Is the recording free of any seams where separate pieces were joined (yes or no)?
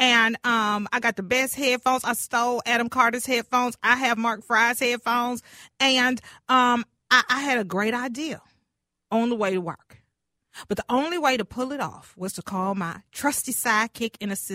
yes